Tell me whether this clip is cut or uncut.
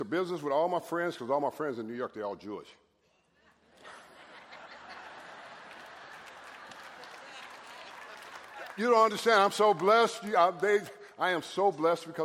uncut